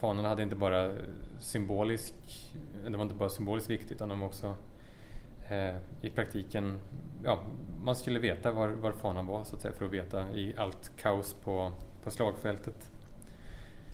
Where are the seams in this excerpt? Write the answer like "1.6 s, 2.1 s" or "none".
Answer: none